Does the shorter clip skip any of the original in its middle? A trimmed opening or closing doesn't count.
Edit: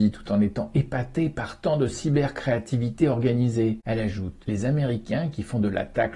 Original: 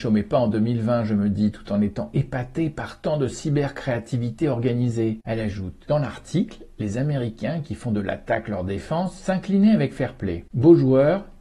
yes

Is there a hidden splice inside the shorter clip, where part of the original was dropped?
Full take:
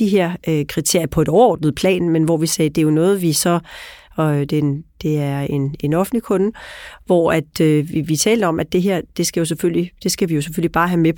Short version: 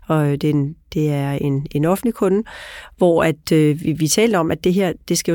no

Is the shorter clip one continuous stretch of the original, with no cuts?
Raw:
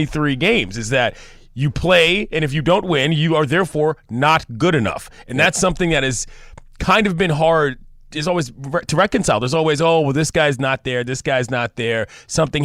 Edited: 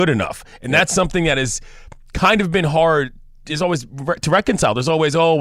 yes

